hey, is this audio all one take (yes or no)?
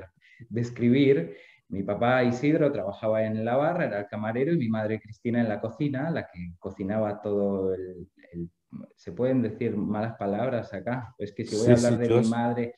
yes